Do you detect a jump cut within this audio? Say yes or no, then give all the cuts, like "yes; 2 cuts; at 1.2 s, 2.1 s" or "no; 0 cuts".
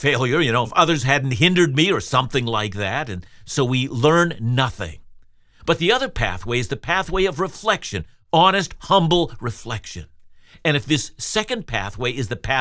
yes; 1 cut; at 8.8 s